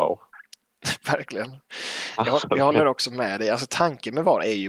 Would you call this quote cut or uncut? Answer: uncut